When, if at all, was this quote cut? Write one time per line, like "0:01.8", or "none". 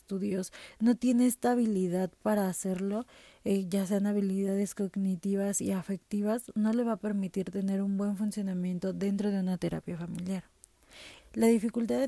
0:11.2